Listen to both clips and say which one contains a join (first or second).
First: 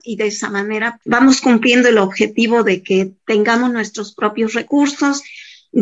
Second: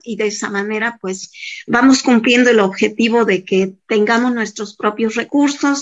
first